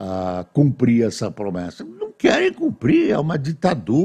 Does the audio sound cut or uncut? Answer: uncut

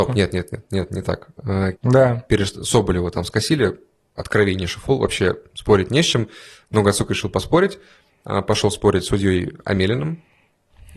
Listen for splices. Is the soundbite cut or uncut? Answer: cut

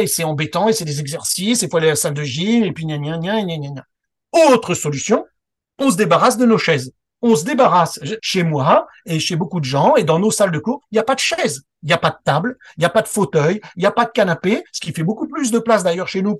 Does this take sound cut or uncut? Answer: cut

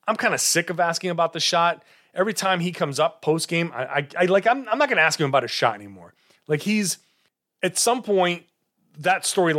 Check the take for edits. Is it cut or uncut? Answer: uncut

